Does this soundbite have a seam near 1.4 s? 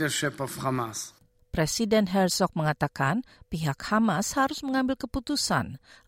yes; 1 cut; at 1.4 s

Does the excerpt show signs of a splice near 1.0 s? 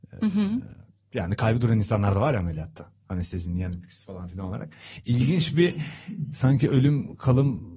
no; 0 cuts

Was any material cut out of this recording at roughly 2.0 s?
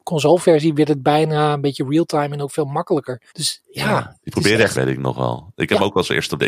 no; 2 cuts; at 3.3 s, 4.7 s

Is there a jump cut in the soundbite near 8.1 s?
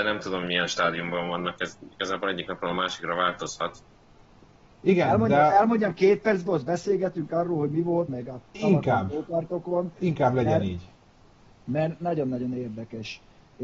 yes; 2 cuts; at 4.7 s, 8.1 s

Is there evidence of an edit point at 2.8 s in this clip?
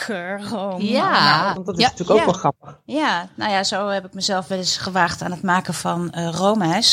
no; 1 cut; at 1.5 s

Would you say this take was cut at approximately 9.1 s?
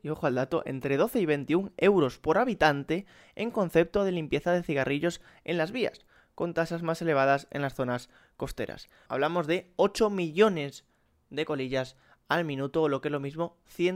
yes; 1 cut; at 9.1 s

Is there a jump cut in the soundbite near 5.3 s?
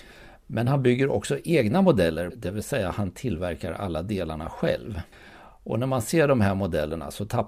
no; 1 cut; at 2.3 s

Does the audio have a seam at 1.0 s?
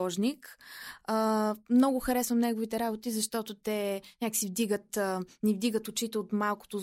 no; 0 cuts

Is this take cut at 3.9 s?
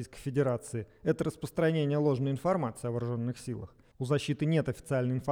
yes; 1 cut; at 3.9 s

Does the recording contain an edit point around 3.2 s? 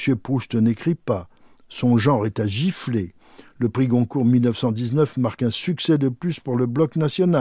no; 0 cuts

